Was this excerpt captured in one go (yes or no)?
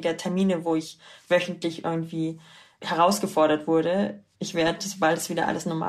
no